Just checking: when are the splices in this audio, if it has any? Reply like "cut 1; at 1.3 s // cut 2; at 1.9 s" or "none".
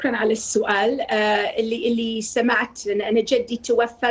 none